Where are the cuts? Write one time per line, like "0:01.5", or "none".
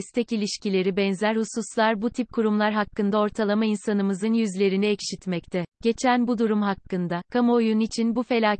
0:05.7